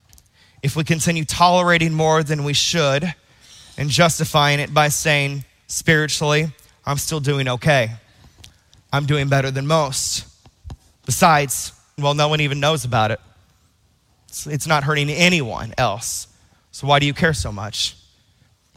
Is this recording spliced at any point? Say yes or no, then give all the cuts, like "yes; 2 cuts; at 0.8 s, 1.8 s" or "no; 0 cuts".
yes; 1 cut; at 12.0 s